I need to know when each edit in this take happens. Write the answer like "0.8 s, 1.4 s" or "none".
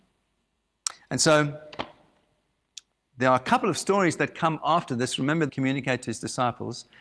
5.5 s